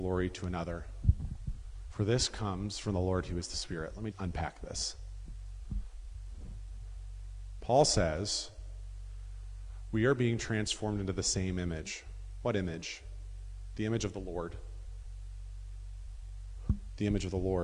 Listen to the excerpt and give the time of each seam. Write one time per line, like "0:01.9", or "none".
0:04.1